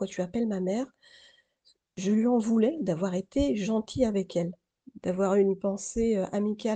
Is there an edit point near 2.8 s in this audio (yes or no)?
yes